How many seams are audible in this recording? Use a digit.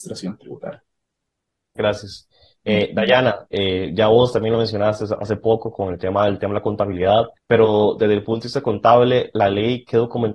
1